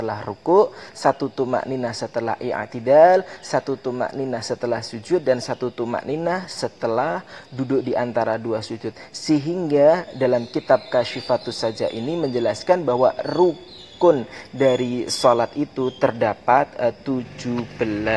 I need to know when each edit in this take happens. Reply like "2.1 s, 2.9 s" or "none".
none